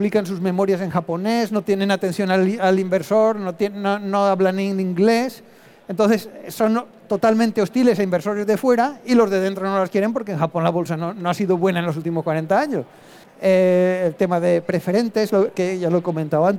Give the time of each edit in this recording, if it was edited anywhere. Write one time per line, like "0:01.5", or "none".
0:13.2
0:15.3